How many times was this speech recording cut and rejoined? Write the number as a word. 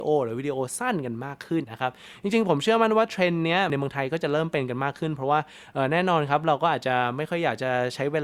one